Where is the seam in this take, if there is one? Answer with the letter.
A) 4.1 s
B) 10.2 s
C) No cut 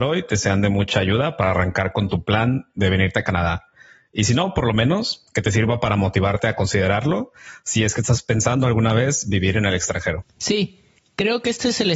B